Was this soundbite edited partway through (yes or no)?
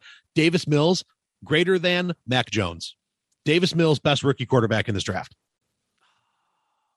no